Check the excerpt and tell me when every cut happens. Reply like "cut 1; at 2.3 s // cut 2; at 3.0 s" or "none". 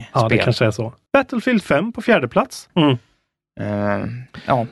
cut 1; at 1.1 s // cut 2; at 2.7 s